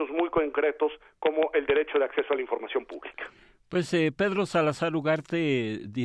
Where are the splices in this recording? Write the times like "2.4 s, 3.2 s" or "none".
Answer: none